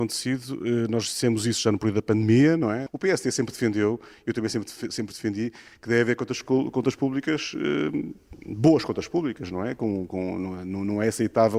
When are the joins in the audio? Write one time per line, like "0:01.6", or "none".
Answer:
0:02.9